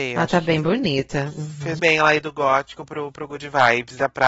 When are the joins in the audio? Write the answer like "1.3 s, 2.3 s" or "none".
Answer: 1.8 s